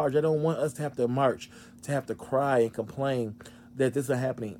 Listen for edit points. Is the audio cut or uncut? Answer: uncut